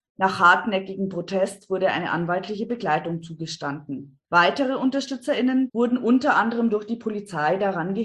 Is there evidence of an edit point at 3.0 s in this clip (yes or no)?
no